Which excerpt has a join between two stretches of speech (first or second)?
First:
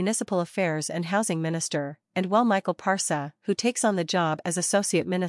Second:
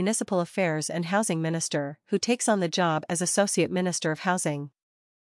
second